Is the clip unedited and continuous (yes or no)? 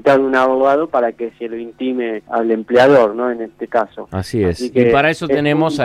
no